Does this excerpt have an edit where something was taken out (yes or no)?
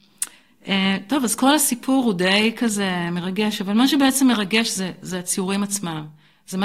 no